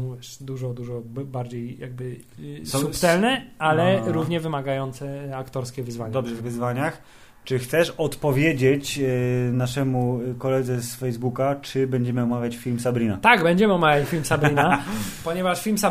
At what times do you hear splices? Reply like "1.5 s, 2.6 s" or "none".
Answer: 6.4 s